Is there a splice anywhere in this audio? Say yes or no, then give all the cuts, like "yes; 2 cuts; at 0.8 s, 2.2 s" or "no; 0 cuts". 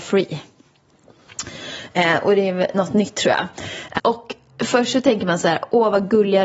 yes; 2 cuts; at 2.7 s, 4.0 s